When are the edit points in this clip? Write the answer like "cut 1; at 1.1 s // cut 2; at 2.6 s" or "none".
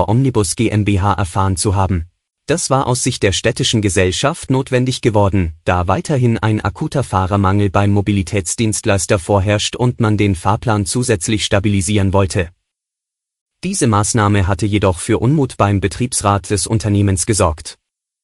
cut 1; at 2.3 s